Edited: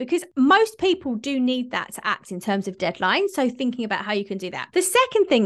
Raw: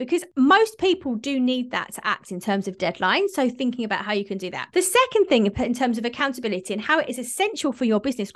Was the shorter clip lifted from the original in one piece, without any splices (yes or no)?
yes